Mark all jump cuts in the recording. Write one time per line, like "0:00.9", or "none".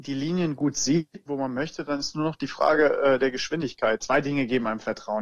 0:01.3
0:04.0